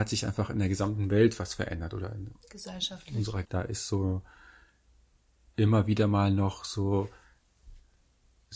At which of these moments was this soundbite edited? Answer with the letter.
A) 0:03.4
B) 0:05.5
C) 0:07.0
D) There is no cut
A